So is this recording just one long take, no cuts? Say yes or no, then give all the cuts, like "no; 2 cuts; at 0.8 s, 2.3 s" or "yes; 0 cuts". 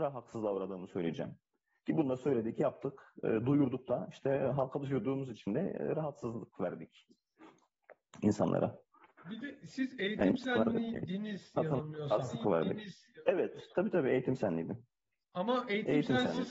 yes; 0 cuts